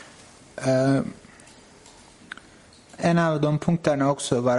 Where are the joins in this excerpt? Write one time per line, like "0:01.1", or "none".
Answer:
0:03.0